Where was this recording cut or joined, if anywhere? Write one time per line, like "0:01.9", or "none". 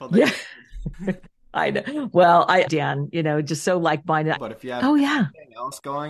0:02.7
0:04.4